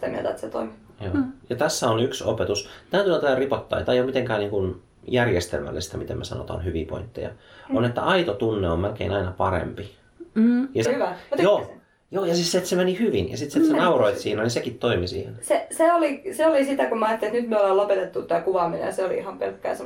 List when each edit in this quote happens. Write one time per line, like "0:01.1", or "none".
0:10.8